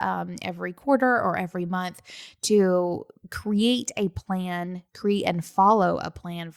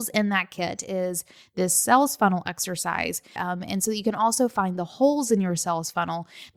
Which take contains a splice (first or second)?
second